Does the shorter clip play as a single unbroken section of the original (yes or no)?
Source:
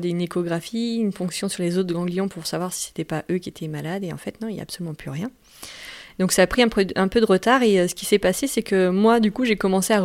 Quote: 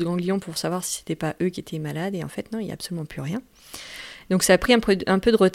yes